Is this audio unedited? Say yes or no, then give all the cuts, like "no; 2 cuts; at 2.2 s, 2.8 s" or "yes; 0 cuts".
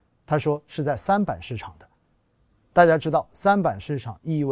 yes; 0 cuts